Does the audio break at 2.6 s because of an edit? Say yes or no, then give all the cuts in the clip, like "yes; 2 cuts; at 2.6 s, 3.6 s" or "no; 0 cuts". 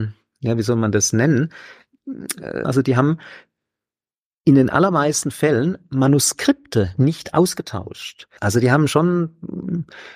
yes; 2 cuts; at 2.6 s, 8.4 s